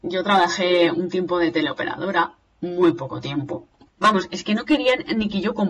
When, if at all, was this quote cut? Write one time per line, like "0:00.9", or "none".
0:03.9